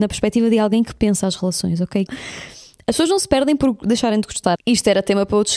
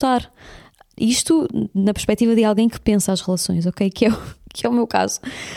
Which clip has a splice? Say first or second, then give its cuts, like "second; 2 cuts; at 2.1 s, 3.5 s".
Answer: first; 2 cuts; at 2.1 s, 4.6 s